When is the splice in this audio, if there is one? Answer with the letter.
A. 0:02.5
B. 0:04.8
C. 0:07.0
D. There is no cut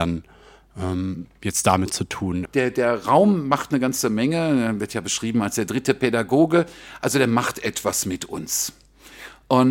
A